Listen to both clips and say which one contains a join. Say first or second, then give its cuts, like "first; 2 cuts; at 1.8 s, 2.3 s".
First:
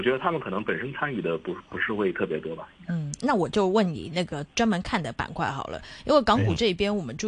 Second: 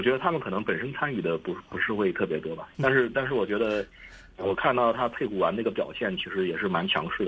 second; 1 cut; at 2.7 s